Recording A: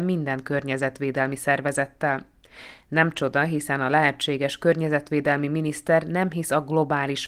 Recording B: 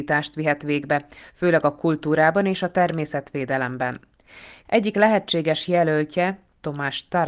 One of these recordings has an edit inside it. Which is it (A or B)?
B